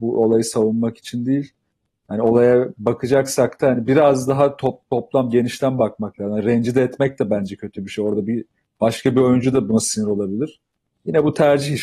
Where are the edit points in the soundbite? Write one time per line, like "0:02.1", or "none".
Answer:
none

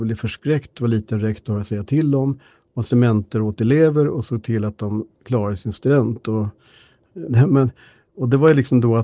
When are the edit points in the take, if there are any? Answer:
0:07.3

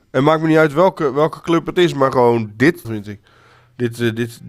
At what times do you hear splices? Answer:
0:02.8

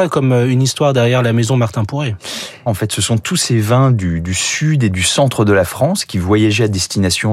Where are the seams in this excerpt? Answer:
0:02.7

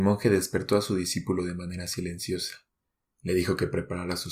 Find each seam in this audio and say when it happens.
none

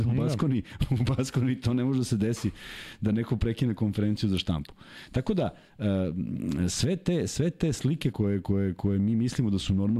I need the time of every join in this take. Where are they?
0:08.1

